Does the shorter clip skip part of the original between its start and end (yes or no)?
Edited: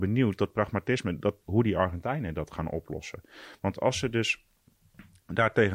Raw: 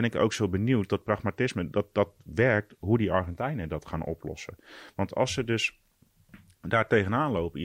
yes